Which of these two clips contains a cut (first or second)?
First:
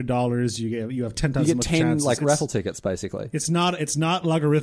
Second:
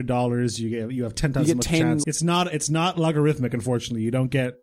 second